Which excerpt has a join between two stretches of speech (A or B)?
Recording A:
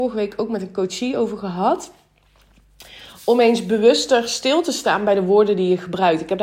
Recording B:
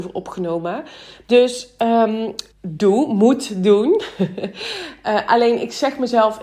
B